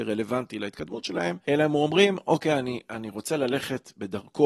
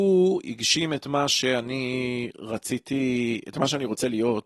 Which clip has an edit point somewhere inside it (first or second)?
first